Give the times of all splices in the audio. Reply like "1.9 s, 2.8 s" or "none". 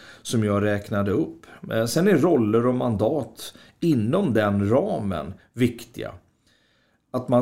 none